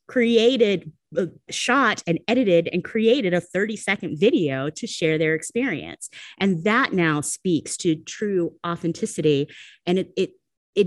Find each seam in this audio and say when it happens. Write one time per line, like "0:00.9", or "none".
0:01.5